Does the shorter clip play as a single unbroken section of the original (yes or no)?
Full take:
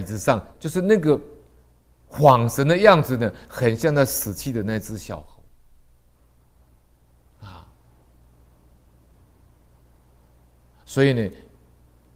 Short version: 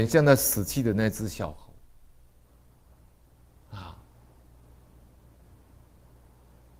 yes